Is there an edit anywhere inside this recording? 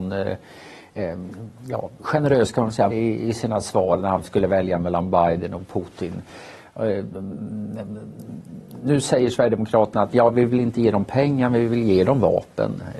yes; 1 cut; at 2.9 s

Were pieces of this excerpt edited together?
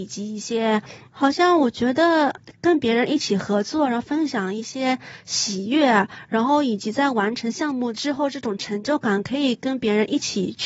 yes; 1 cut; at 1.1 s

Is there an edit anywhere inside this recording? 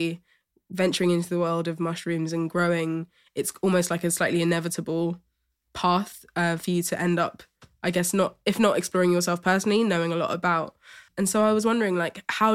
no; 0 cuts

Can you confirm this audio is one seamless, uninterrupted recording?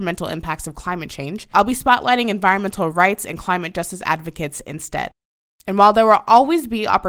yes; 0 cuts

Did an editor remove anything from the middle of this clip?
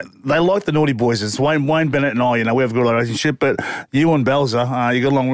no; 0 cuts

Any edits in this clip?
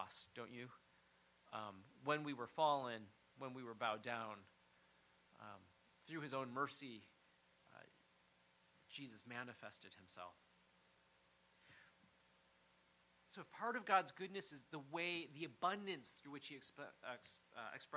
no; 0 cuts

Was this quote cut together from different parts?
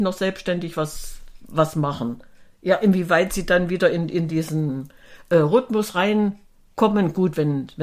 no; 0 cuts

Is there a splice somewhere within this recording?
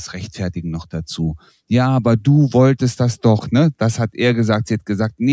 no; 0 cuts

